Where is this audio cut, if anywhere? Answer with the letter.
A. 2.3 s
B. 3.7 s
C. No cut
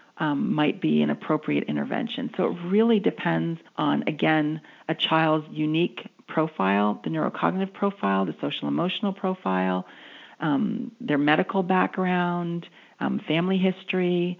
B